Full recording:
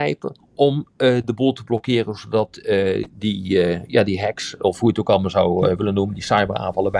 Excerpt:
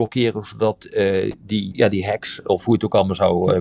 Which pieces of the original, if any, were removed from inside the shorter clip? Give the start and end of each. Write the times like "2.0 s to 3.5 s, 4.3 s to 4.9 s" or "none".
3.4 s to 3.9 s